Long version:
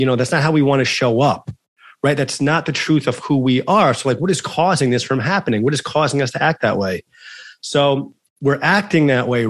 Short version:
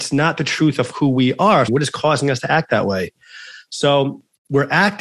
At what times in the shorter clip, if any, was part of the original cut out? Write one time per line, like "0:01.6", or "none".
0:01.7